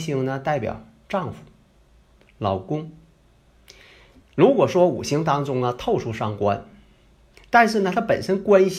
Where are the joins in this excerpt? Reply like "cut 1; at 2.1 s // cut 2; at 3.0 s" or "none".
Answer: none